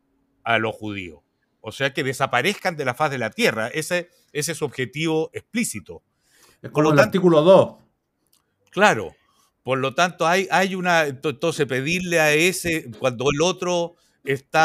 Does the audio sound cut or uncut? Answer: uncut